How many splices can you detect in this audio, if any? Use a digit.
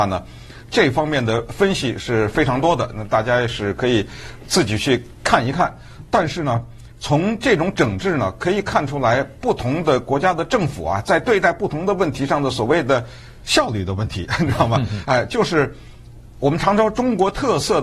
0